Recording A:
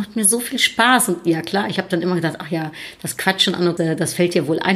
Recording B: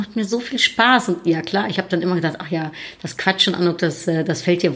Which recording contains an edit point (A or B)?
A